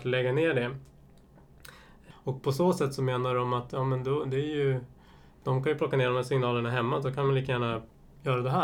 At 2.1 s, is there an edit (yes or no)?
yes